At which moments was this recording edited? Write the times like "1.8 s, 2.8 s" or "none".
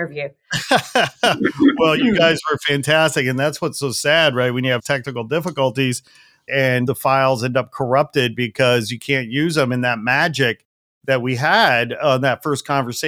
none